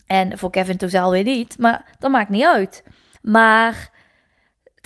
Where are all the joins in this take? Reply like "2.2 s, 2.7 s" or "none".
3.2 s

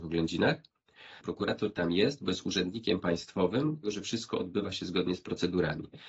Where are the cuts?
1.2 s, 3.8 s

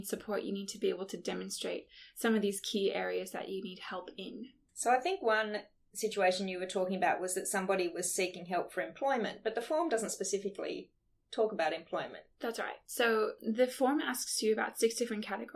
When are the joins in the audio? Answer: none

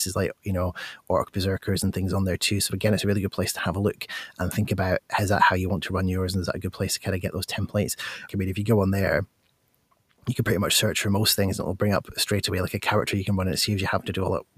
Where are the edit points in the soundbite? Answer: 8.3 s

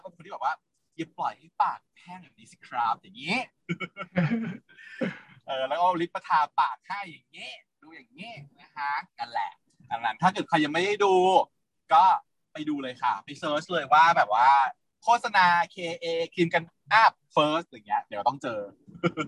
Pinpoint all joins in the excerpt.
9.1 s, 16.7 s

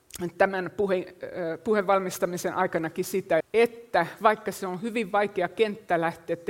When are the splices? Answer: 3.4 s

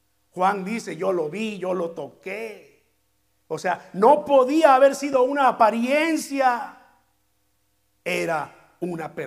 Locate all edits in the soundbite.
none

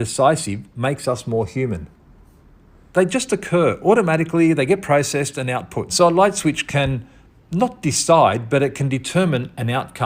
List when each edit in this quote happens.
2.9 s, 5.9 s

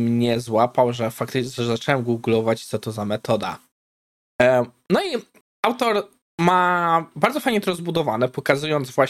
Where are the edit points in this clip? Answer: none

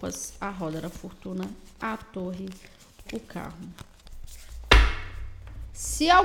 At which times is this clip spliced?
3.0 s

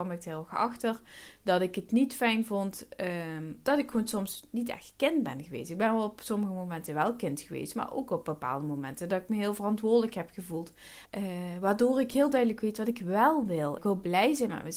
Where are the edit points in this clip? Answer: 11.0 s, 13.8 s

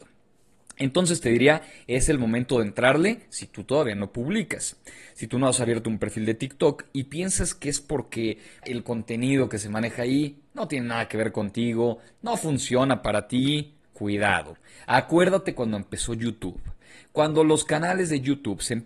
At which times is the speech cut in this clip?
8.6 s, 13.8 s

